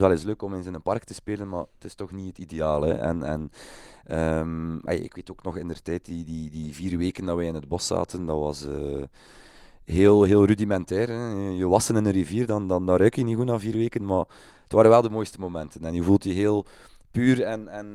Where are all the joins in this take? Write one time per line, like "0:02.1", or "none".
none